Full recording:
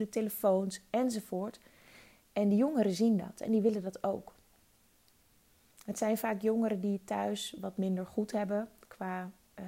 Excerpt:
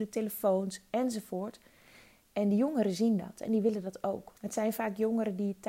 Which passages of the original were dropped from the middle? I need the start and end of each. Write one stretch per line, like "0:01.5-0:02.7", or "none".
0:04.4-0:05.8